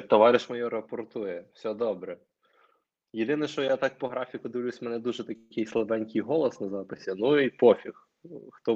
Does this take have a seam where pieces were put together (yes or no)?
no